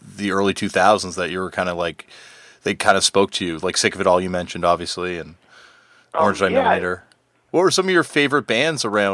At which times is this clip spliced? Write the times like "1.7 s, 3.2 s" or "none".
7.5 s